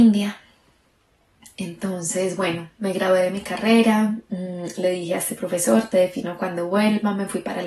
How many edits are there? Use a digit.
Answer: 0